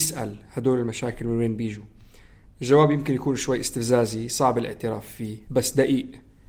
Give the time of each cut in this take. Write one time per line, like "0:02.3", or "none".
0:05.5